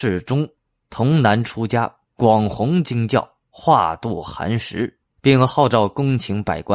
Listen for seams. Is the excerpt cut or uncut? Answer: cut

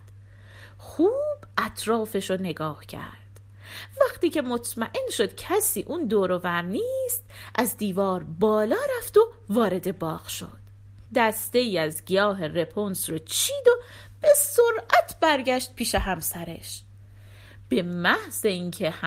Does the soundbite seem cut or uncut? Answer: cut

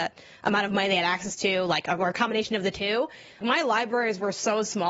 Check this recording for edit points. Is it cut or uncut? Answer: cut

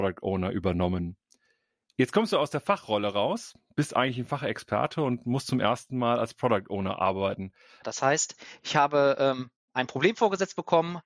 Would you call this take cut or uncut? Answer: cut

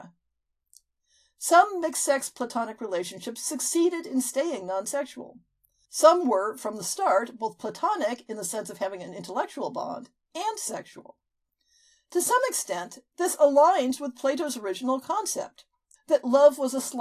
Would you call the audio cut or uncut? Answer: cut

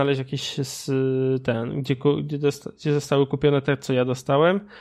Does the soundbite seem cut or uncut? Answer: uncut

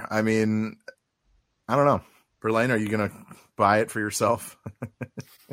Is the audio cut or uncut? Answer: cut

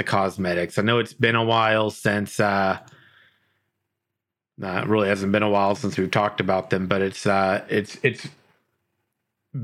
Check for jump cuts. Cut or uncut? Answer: uncut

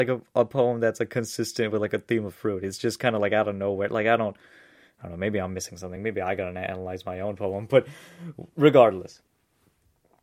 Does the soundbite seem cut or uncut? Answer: uncut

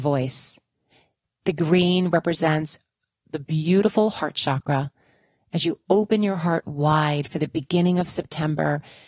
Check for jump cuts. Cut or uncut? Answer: cut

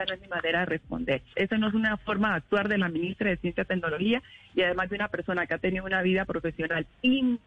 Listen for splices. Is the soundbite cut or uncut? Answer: cut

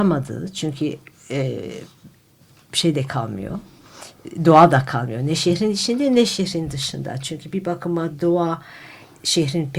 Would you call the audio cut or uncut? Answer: uncut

